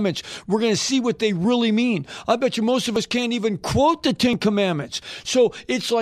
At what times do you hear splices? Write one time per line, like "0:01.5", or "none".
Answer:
none

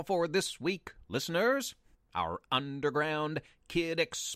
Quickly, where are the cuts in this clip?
0:01.9

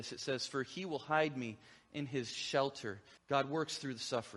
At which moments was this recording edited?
0:03.2

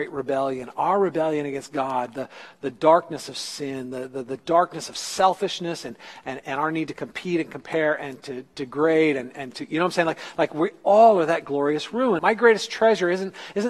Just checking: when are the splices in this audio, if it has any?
0:12.2

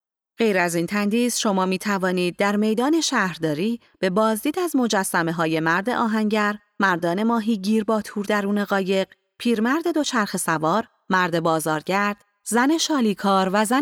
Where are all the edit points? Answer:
none

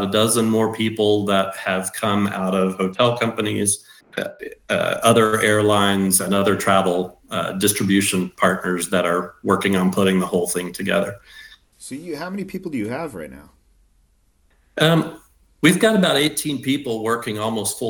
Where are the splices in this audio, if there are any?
0:04.0
0:11.7

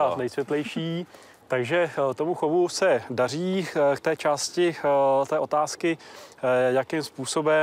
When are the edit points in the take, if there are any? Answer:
0:01.4

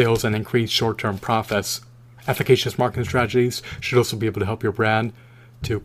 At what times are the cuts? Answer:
none

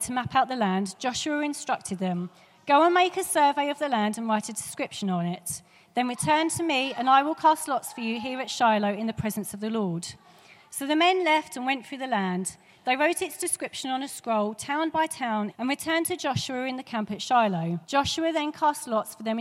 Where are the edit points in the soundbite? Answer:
0:15.5
0:17.8

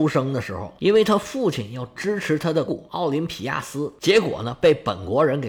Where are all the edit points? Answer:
0:02.7

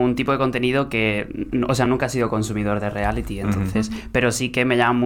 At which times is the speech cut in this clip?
none

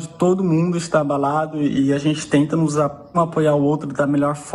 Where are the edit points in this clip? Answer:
0:03.1

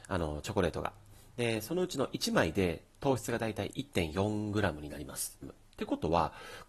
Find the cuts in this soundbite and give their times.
0:05.4

